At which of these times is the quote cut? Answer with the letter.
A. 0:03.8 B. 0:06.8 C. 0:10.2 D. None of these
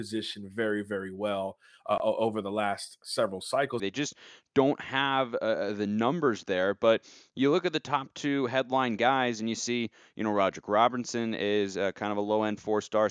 A